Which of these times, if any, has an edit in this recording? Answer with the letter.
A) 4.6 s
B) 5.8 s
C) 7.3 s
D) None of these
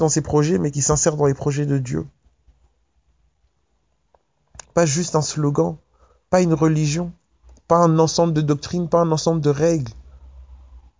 A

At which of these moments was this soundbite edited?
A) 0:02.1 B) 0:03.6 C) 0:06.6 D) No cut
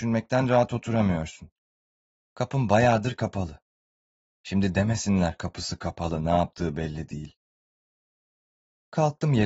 A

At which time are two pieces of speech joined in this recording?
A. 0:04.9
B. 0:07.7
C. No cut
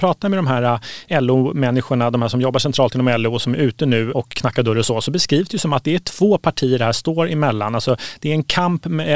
C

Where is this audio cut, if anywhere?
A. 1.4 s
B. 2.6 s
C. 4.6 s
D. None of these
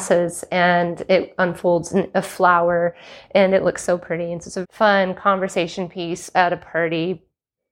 C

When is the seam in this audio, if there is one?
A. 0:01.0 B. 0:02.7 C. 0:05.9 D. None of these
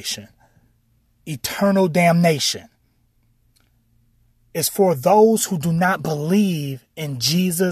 D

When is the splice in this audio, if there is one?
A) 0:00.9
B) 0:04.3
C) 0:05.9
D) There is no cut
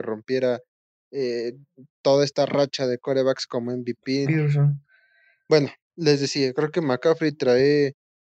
B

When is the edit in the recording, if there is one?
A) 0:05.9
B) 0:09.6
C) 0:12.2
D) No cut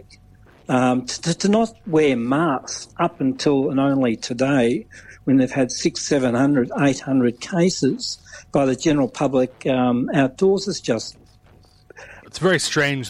C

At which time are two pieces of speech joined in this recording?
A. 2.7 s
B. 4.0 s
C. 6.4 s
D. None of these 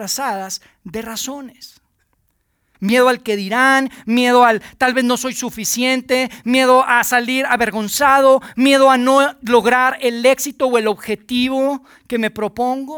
A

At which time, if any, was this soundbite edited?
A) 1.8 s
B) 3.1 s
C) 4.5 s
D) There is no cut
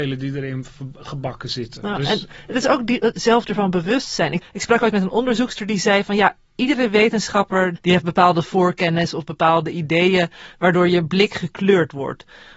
B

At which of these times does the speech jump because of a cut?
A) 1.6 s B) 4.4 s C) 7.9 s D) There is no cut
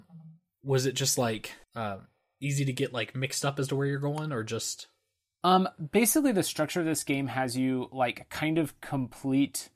A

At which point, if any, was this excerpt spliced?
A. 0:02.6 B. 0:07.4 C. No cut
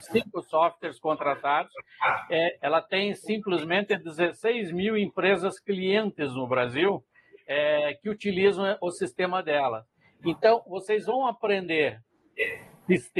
A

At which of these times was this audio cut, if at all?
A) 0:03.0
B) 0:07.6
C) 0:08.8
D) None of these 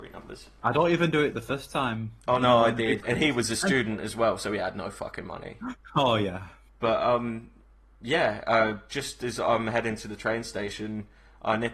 A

